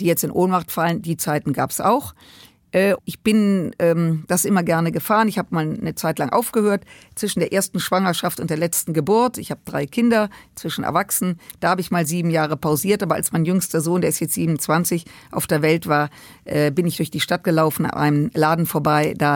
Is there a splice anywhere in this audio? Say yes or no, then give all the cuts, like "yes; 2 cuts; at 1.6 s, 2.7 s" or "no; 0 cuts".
yes; 1 cut; at 3.0 s